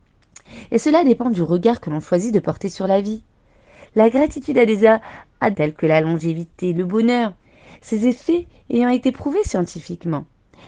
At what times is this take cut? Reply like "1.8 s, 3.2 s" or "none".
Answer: 5.5 s